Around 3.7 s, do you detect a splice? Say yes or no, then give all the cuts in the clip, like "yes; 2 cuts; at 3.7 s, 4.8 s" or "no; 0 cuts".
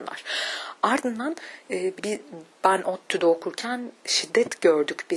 no; 1 cut; at 2.0 s